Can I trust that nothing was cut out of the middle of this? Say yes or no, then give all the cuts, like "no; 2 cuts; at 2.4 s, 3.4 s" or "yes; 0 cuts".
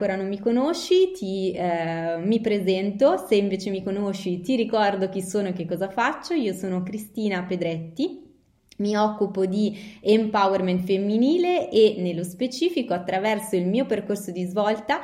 yes; 0 cuts